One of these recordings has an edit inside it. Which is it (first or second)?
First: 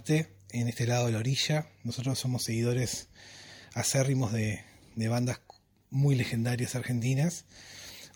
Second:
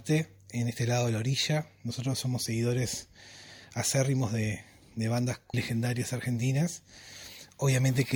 second